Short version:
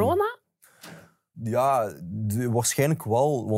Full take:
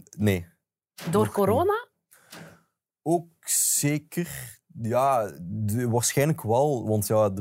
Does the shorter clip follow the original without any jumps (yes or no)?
no